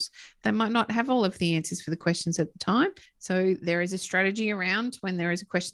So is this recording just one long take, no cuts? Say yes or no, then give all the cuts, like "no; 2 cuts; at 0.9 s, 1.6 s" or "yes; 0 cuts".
no; 1 cut; at 3.0 s